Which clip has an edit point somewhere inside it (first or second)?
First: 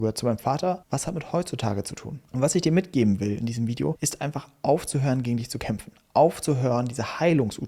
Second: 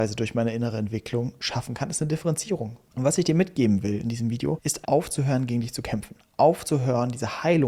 second